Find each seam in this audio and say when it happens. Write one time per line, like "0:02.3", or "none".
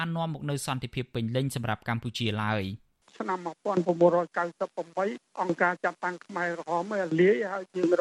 none